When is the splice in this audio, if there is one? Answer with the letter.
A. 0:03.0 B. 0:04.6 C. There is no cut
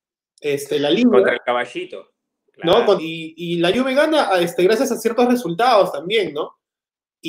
A